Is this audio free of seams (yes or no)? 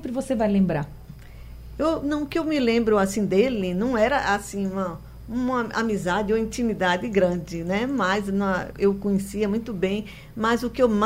no